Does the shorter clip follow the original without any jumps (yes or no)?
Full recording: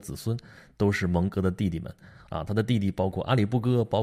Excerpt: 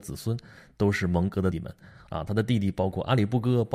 no